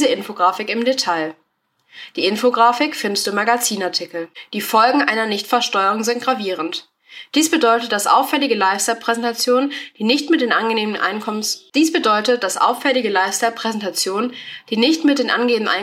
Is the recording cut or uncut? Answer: cut